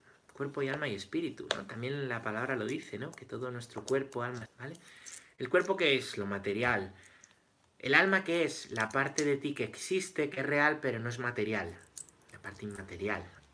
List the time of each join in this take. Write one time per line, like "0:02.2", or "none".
0:04.5